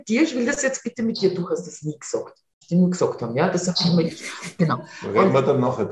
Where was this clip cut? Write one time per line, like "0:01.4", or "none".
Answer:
0:02.6